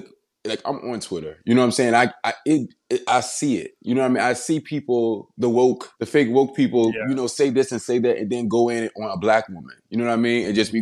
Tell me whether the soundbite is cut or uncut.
cut